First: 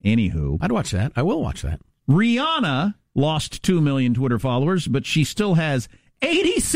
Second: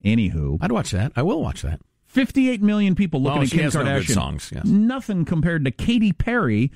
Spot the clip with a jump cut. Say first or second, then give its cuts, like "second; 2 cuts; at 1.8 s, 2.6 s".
second; 1 cut; at 1.9 s